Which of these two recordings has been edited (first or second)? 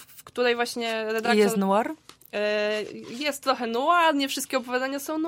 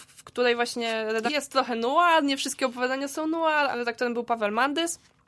second